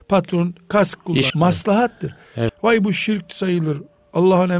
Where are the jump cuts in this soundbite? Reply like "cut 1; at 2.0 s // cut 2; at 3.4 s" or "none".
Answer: cut 1; at 1.3 s // cut 2; at 2.5 s

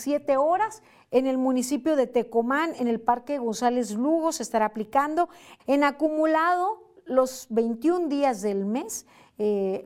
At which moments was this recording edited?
cut 1; at 5.6 s

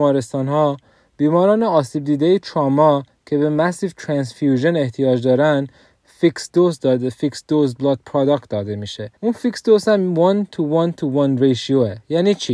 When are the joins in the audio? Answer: cut 1; at 9.2 s

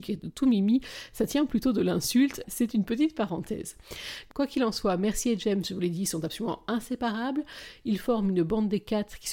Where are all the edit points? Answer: cut 1; at 2.4 s

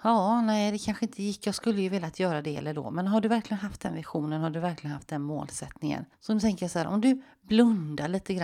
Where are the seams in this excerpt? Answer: cut 1; at 6.1 s

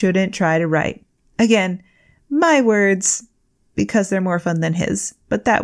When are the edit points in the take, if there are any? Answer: none

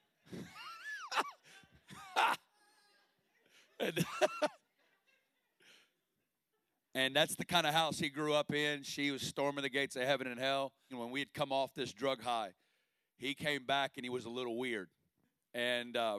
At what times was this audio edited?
cut 1; at 10.9 s

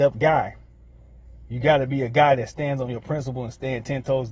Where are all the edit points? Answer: none

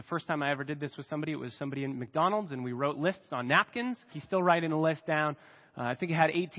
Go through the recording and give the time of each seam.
cut 1; at 4.1 s

